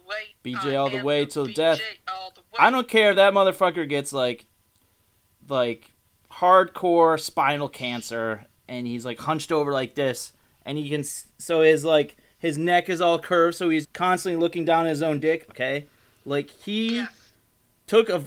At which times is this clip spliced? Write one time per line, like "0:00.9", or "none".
0:13.8
0:15.5